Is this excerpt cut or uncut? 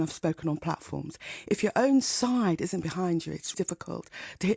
cut